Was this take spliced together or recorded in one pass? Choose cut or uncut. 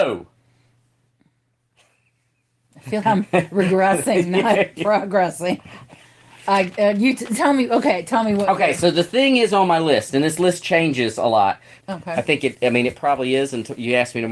cut